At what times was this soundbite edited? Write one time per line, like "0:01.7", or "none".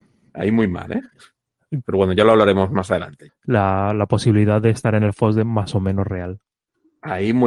0:01.8
0:03.3